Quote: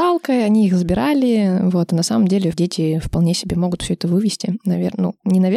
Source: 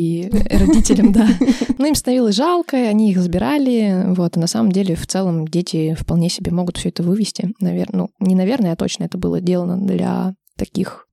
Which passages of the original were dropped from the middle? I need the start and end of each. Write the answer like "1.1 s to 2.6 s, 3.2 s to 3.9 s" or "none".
5.0 s to 5.5 s